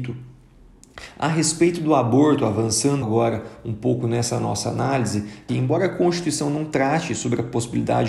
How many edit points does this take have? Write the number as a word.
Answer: two